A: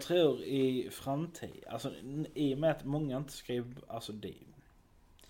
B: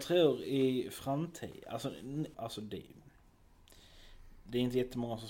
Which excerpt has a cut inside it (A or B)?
B